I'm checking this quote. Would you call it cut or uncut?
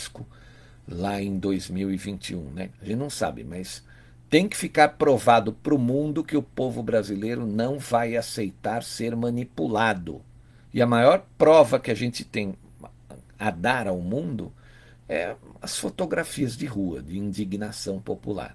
cut